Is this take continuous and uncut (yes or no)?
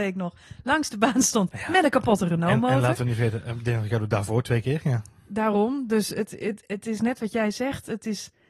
yes